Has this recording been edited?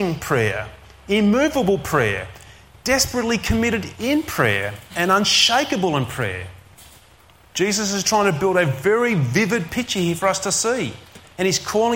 no; 0 cuts

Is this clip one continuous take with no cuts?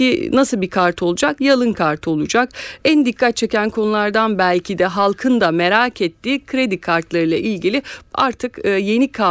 no; 2 cuts; at 1.4 s, 2.8 s

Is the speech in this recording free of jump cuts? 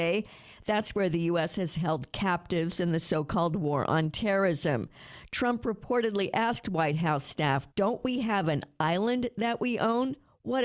no; 1 cut; at 7.7 s

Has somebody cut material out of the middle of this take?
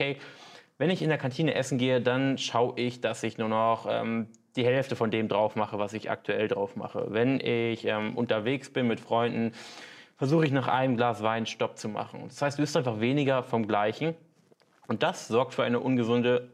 no; 0 cuts

